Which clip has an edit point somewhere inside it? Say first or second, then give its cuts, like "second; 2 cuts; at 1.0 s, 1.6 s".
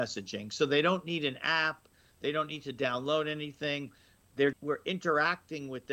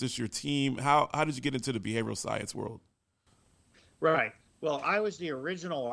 first; 1 cut; at 4.5 s